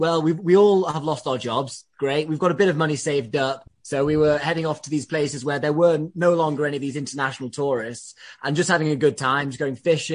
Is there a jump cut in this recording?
no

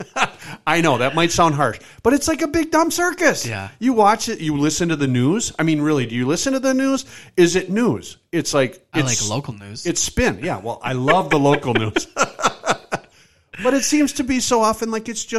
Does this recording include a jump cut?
no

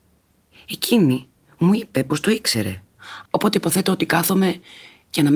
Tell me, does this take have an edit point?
yes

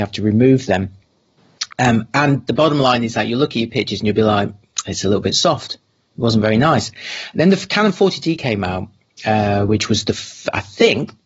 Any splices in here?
no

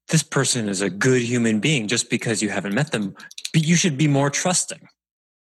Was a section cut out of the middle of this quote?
no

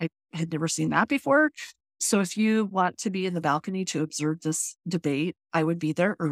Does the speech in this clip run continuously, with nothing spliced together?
yes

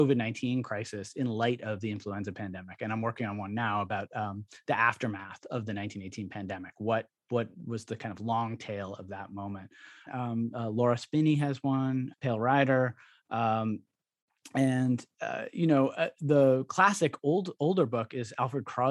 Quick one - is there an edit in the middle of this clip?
yes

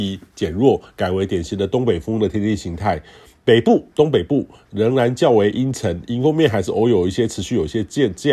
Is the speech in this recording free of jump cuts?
yes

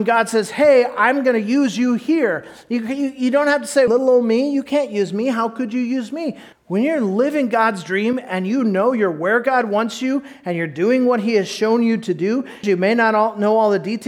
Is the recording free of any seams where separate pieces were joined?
no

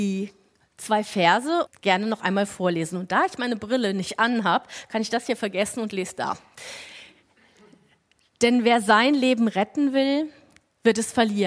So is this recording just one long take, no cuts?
no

